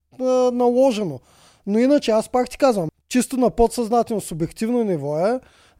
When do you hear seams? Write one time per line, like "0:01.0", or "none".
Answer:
0:02.9